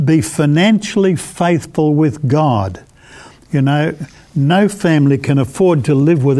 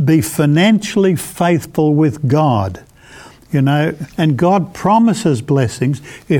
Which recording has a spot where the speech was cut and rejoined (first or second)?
second